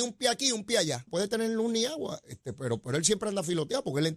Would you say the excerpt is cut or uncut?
cut